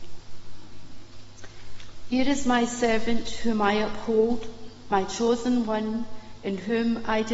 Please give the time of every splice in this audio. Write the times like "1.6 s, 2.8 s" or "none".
none